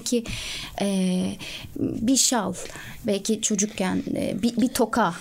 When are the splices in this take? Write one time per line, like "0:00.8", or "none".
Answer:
none